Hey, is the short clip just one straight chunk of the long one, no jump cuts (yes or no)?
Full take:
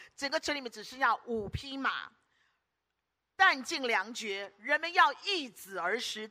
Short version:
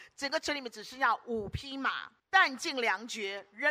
no